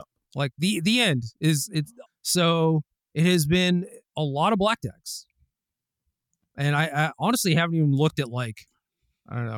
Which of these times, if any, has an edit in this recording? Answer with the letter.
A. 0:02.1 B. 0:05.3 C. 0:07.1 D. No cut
A